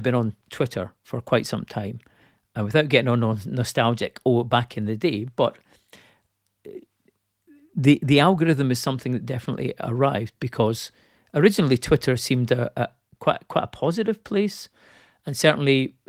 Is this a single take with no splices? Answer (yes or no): yes